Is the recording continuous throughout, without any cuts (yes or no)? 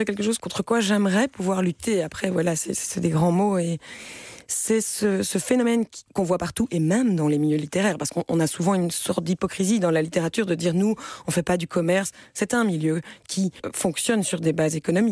yes